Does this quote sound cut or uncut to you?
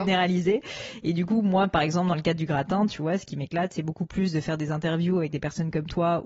uncut